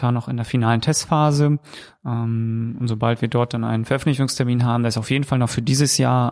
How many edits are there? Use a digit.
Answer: 0